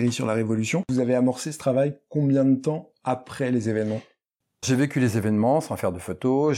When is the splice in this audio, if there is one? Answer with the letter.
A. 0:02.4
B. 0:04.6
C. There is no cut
B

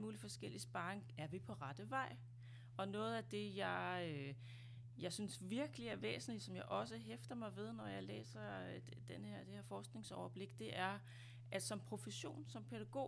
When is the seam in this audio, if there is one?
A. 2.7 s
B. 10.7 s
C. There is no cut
C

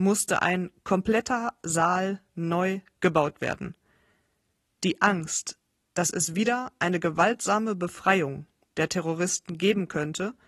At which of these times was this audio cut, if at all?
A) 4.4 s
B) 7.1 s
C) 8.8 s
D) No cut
D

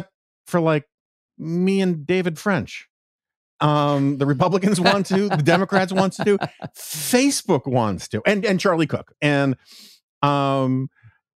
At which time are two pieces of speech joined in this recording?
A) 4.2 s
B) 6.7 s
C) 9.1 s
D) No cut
C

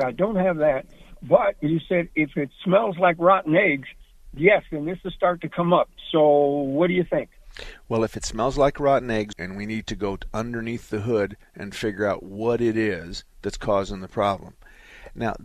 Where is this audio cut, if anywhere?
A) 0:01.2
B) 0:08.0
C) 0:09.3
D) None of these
C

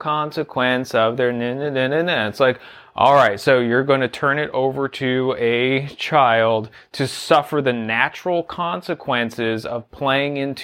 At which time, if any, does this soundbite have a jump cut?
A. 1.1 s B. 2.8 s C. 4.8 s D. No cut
D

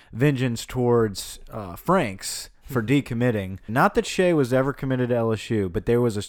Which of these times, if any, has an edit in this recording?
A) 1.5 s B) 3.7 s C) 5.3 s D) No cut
B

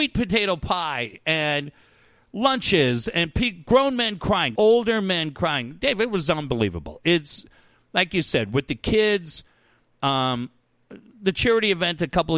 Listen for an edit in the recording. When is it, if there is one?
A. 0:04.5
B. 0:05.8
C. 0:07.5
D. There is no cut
A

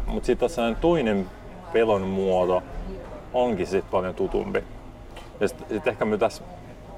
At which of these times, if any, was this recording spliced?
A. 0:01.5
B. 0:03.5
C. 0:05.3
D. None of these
D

